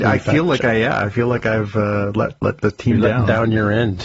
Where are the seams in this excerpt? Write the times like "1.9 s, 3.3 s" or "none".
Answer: none